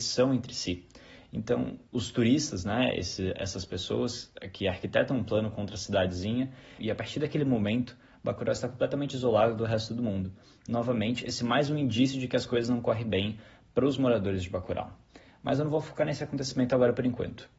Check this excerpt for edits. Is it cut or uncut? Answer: cut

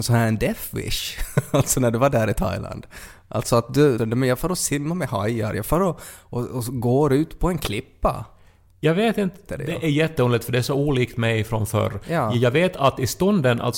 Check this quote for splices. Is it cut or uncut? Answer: cut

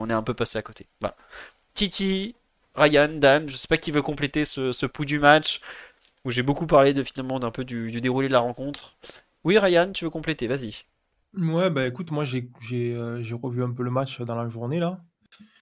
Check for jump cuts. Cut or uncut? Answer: uncut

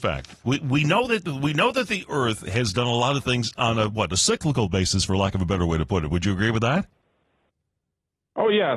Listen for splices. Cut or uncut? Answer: uncut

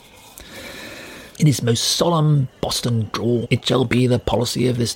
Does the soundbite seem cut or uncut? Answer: cut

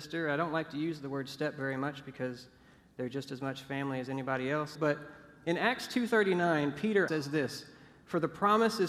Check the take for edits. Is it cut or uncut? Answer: cut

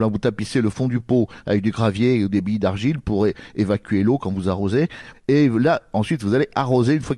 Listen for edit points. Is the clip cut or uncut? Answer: cut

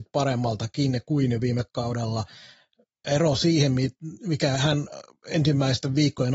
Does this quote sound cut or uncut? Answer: uncut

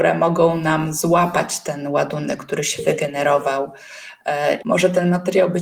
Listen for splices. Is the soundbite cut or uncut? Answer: cut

